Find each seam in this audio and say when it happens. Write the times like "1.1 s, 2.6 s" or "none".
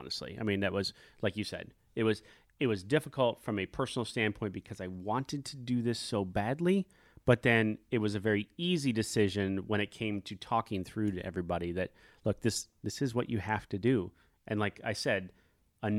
none